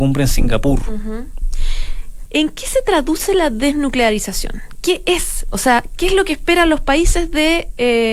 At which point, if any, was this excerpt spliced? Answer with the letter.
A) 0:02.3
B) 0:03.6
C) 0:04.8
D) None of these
A